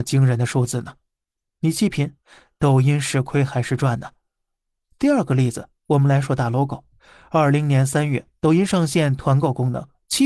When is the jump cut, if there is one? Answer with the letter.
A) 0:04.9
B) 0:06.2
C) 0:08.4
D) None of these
B